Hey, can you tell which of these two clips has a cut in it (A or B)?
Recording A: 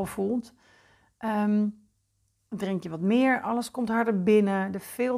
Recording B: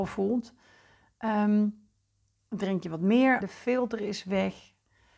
B